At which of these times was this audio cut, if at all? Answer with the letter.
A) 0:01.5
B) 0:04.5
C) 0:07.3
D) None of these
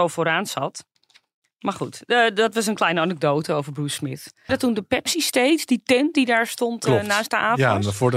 B